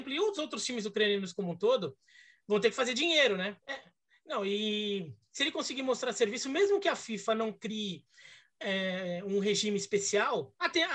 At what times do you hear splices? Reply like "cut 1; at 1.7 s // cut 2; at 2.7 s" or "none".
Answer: cut 1; at 3.6 s